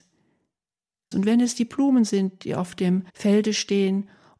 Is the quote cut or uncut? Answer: cut